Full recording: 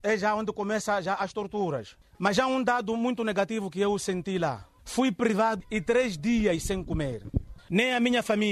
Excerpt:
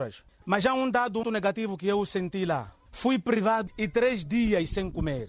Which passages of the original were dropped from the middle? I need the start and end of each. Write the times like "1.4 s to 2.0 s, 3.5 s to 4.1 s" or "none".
3.0 s to 3.2 s